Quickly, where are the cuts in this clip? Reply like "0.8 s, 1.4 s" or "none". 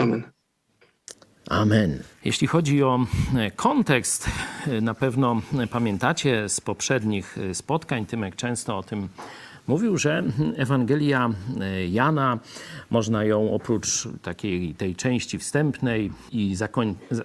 2.1 s, 16.3 s